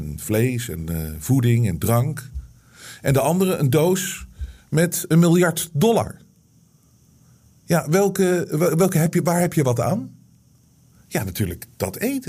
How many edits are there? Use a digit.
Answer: 0